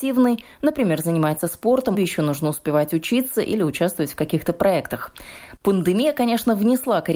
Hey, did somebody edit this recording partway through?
yes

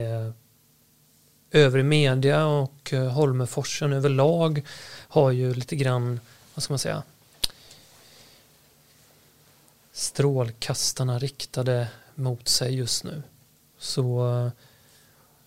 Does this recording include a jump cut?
no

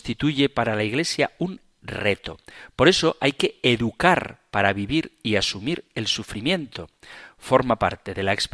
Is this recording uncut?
yes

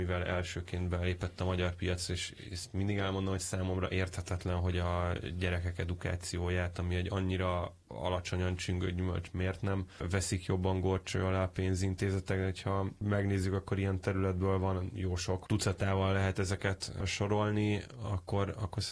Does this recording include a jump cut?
no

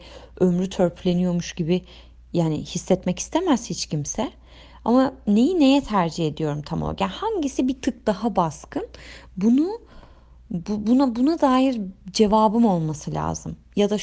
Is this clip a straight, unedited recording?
yes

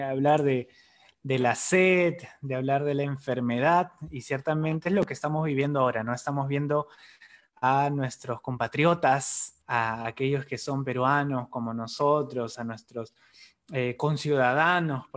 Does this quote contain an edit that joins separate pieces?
yes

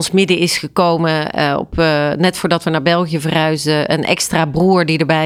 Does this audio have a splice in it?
no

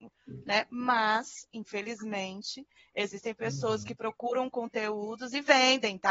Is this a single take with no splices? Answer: yes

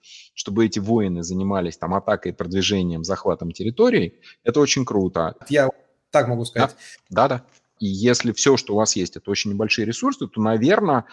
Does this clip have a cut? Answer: yes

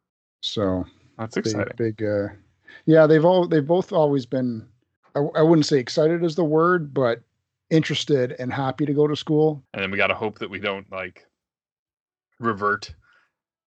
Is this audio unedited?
no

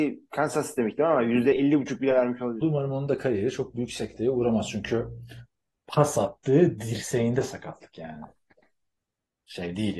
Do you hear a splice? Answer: yes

